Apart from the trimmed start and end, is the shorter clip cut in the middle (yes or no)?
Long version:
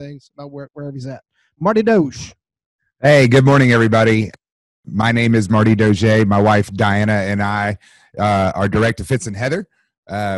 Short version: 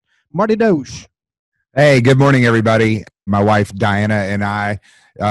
yes